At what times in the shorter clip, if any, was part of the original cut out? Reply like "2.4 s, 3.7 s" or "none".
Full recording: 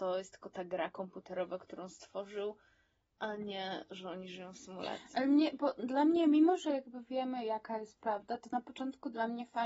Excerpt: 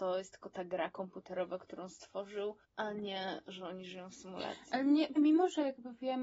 2.6 s, 5.2 s